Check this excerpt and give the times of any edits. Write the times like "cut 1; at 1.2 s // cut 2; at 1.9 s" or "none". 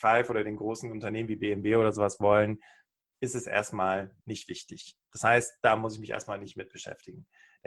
cut 1; at 4.2 s